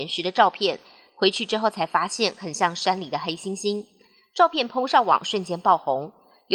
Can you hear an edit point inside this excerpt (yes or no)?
no